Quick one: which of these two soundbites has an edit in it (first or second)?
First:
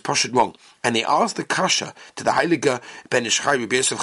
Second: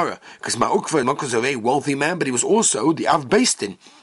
second